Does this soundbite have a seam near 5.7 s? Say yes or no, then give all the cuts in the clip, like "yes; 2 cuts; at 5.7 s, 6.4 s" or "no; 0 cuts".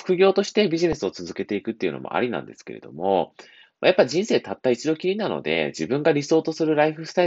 no; 0 cuts